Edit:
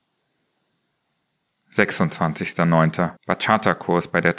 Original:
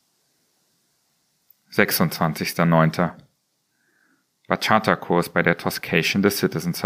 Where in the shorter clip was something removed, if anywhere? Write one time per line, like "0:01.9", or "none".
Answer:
0:03.2